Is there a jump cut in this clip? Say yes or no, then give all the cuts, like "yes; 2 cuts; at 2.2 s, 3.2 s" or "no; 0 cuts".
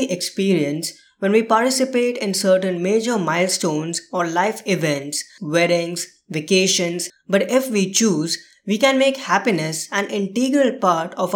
yes; 2 cuts; at 5.4 s, 7.1 s